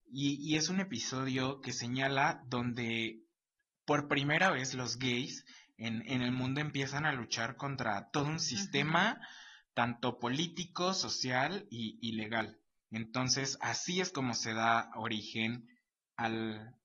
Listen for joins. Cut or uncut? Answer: uncut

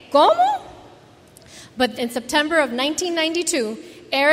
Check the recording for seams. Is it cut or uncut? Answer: cut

